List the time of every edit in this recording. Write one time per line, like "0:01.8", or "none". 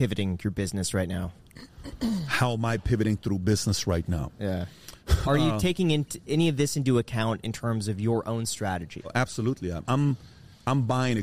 0:09.8